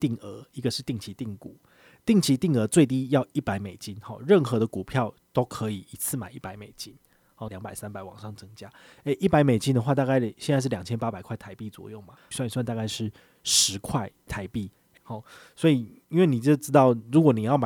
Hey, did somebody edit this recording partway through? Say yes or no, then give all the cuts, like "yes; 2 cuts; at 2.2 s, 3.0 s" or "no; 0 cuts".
yes; 3 cuts; at 7.5 s, 12.3 s, 15.0 s